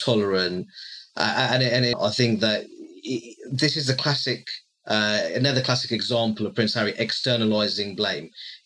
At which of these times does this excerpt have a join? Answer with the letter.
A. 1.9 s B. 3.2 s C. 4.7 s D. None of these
A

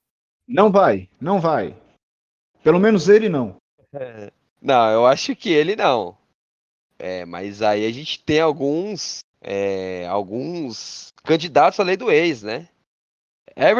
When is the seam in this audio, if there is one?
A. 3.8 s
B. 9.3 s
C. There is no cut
B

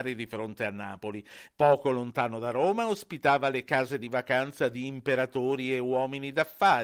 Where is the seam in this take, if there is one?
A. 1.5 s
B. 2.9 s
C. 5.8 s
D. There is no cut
A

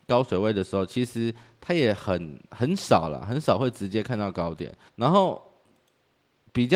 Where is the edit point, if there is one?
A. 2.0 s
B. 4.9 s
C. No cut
B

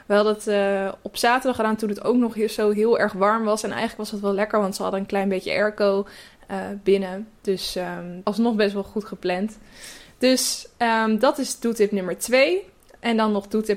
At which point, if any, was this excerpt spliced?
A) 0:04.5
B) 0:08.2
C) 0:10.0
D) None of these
B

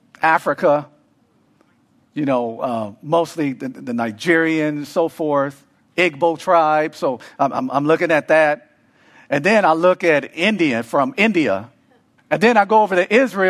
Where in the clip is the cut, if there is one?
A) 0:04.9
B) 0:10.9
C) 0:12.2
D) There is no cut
C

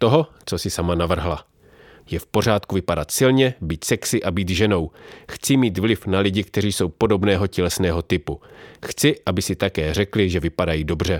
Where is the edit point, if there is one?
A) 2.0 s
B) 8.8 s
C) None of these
A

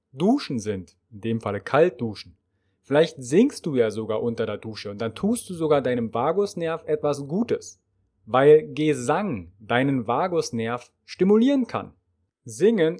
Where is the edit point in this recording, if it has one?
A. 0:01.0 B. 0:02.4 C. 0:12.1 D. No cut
D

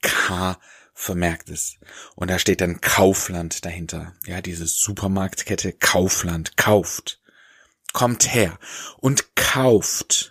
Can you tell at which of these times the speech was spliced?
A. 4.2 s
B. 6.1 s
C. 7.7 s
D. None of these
D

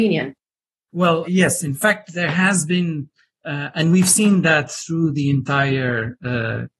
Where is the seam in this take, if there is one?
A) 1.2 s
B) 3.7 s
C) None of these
A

